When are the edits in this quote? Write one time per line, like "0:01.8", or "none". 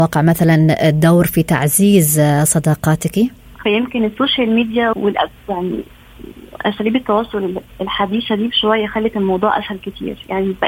0:03.6
0:04.9